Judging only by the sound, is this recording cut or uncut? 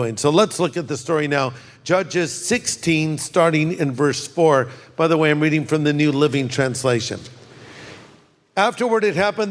uncut